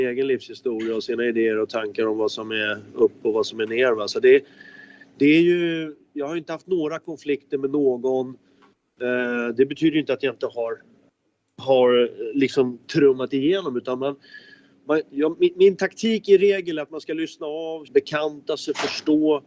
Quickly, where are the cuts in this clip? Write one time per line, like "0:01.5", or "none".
0:17.8